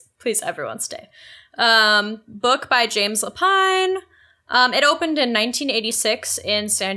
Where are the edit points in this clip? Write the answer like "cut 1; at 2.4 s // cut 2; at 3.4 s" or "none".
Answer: none